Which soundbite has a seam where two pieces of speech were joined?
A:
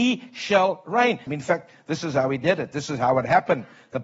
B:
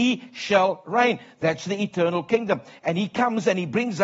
A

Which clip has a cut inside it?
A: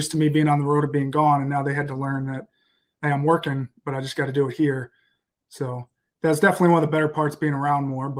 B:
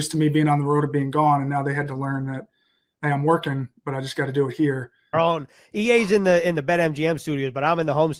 B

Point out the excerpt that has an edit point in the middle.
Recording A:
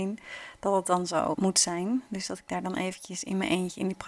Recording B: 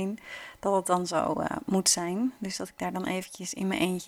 A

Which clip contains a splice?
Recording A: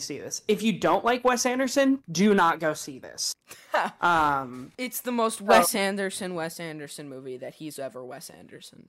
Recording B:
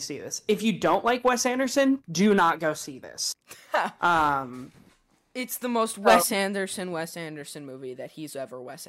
A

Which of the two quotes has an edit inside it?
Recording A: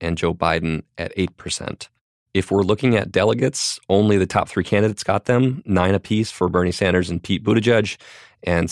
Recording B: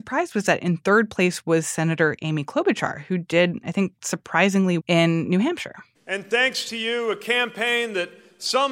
B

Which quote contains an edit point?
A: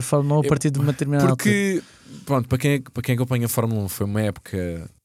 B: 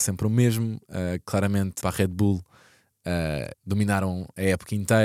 B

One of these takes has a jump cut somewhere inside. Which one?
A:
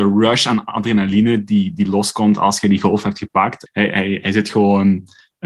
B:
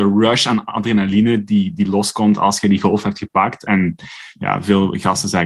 A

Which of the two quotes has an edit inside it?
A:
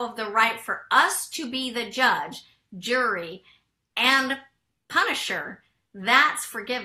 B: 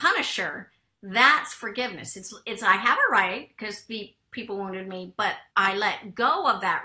B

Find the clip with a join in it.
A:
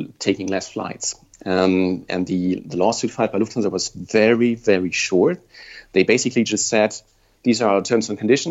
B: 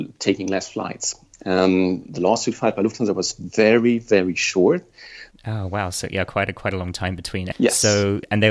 B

